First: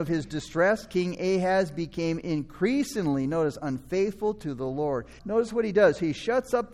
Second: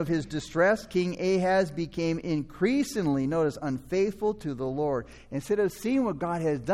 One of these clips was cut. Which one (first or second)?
first